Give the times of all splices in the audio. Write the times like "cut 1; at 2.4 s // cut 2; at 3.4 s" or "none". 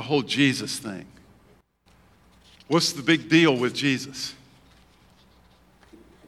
none